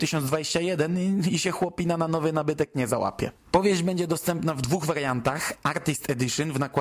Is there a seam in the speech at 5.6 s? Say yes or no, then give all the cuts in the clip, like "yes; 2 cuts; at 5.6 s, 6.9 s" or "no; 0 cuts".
no; 1 cut; at 3.5 s